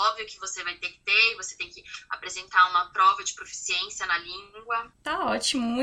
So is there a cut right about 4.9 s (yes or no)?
yes